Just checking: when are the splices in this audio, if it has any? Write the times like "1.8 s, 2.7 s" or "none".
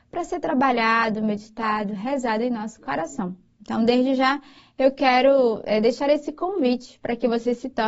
none